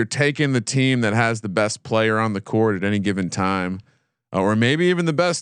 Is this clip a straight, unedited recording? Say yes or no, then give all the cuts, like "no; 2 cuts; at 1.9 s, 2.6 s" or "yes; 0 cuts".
yes; 0 cuts